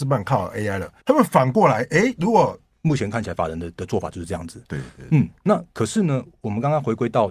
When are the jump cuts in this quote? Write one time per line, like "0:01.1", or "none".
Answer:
0:01.0
0:02.7